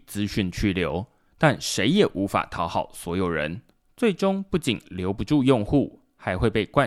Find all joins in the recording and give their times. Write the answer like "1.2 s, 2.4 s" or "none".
none